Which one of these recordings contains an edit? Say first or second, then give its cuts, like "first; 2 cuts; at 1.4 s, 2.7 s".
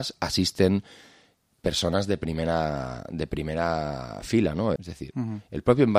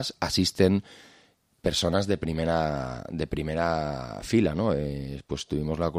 first; 1 cut; at 4.8 s